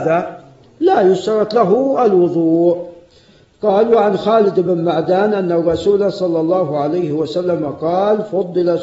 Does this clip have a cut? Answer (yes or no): no